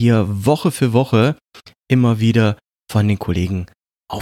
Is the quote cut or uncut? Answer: uncut